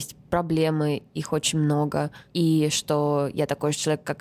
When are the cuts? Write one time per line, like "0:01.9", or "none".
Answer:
none